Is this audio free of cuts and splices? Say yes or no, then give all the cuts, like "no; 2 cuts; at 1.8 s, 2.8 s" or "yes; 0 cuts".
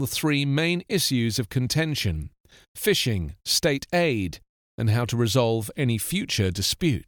yes; 0 cuts